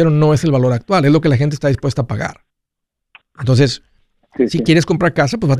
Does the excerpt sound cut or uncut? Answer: uncut